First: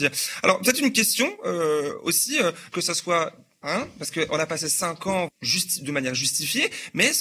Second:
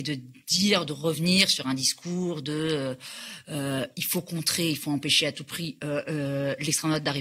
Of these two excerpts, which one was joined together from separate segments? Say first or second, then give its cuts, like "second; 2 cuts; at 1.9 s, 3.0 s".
first; 2 cuts; at 2.7 s, 5.3 s